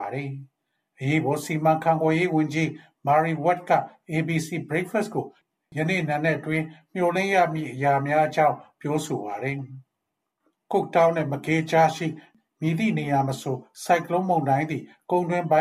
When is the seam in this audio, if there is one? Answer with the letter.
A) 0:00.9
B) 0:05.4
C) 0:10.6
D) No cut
D